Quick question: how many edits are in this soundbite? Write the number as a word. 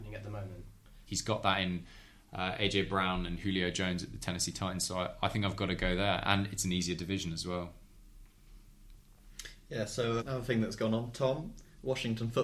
two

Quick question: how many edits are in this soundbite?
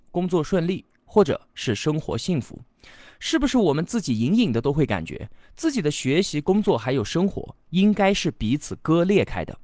zero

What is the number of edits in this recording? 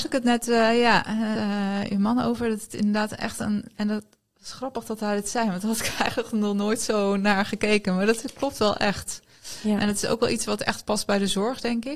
one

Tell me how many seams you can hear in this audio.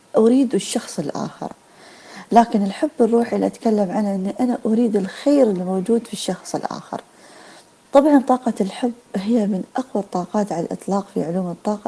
zero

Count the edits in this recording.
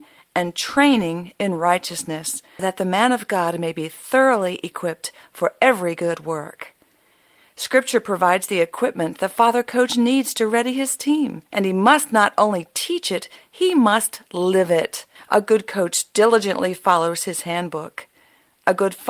three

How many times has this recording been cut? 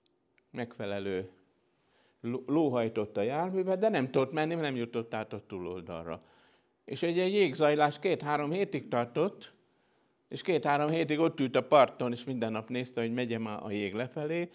zero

